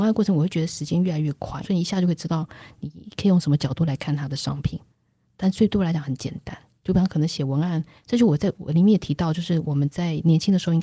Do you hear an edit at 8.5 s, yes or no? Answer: yes